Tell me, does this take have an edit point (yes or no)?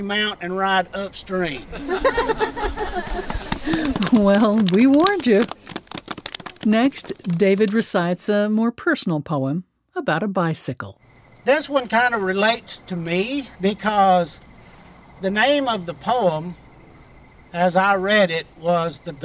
yes